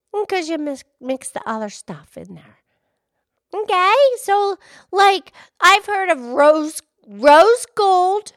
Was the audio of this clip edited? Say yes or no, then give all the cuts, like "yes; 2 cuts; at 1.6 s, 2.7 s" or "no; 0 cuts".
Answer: yes; 1 cut; at 3.4 s